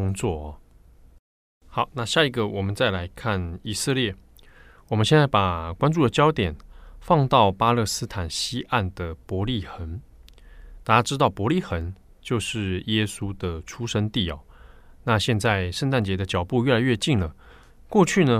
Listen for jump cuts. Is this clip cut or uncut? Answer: uncut